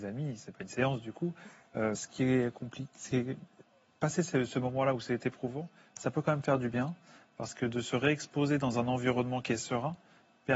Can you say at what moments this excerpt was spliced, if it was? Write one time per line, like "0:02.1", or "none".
0:01.9